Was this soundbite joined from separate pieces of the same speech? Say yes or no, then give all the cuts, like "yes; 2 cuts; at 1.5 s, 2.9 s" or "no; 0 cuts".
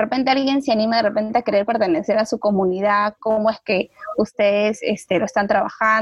no; 0 cuts